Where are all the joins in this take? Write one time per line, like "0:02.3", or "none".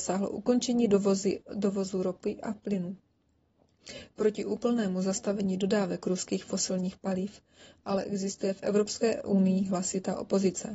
none